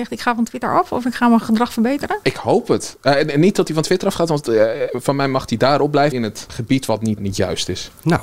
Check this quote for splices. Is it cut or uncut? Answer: cut